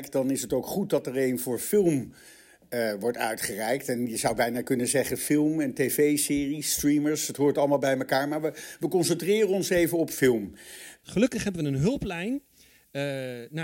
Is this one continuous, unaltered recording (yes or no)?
no